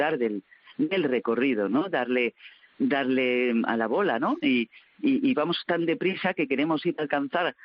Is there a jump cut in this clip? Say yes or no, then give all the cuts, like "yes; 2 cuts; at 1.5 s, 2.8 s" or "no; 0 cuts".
yes; 2 cuts; at 1.9 s, 4.4 s